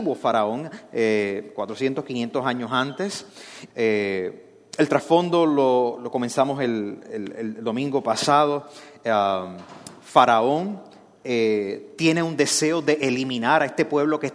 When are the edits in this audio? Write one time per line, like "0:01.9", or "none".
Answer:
0:03.7